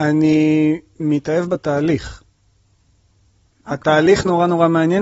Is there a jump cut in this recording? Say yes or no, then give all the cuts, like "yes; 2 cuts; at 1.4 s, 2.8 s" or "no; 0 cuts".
no; 0 cuts